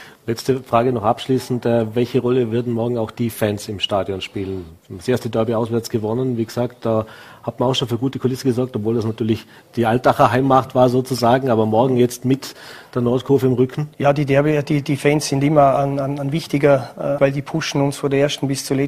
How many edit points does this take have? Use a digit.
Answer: 2